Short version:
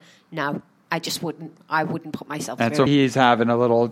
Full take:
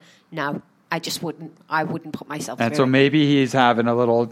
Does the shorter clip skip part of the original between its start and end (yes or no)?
yes